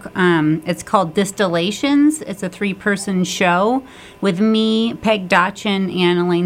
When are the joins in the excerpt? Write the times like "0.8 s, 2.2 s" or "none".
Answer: none